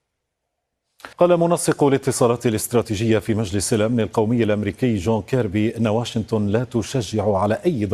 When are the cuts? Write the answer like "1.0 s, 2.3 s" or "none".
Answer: 1.1 s